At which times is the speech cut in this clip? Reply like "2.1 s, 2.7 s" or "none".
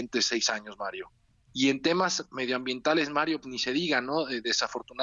1.5 s, 3.4 s